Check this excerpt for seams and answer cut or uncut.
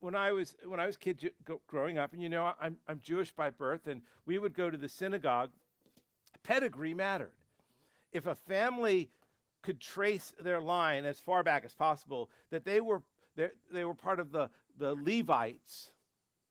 uncut